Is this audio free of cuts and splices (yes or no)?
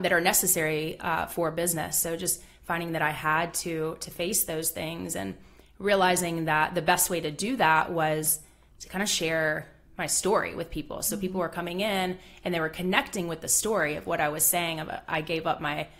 yes